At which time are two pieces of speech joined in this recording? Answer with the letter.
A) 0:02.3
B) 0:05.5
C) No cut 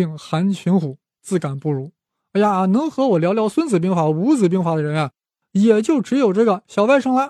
C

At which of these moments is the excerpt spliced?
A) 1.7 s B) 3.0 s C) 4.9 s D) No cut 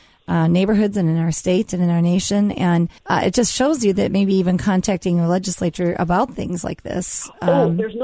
B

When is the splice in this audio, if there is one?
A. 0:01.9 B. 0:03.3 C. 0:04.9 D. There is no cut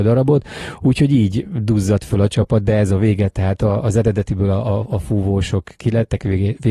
D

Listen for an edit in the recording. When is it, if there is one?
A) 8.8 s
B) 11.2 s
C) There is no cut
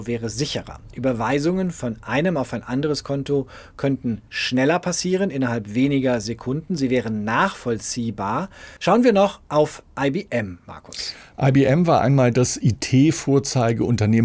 A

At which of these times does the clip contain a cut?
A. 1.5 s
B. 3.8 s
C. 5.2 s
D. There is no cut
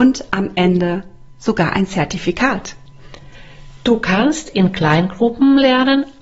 D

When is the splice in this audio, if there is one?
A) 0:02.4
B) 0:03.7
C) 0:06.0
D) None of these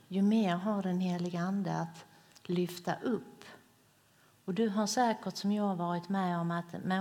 D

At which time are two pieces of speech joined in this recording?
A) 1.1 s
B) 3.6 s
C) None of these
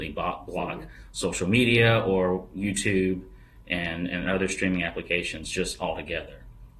C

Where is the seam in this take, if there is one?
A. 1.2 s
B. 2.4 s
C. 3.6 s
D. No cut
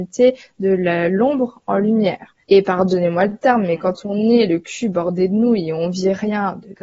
B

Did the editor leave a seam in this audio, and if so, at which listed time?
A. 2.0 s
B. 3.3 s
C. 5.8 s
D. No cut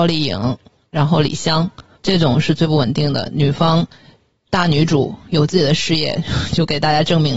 A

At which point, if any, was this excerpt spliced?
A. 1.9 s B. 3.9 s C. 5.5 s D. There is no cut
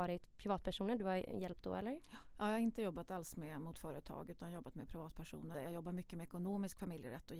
C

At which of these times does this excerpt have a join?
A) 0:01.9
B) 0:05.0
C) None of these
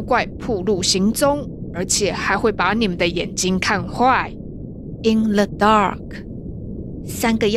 B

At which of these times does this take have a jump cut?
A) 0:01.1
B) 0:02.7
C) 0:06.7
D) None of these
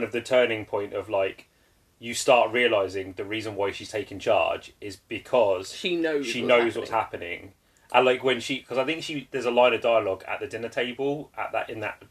D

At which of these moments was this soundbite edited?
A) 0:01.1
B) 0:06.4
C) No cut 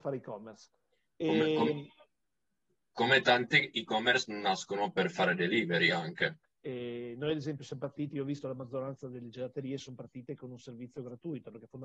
B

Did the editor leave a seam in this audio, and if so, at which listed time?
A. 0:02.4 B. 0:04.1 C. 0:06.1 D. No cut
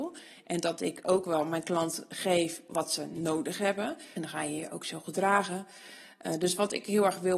B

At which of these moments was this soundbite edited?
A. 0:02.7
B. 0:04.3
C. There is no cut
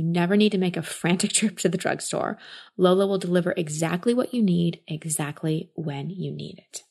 C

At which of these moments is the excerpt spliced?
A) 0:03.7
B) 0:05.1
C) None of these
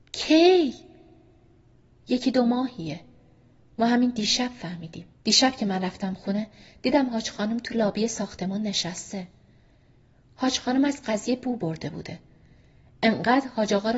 B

